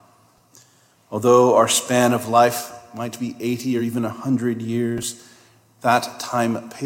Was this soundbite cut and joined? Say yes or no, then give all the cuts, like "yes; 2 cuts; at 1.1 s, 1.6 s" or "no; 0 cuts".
no; 0 cuts